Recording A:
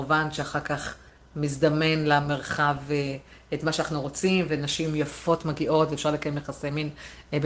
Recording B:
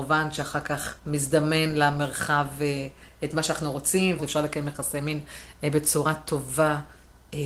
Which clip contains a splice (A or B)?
B